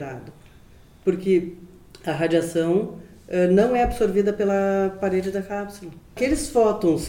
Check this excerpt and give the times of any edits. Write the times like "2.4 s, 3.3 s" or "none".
none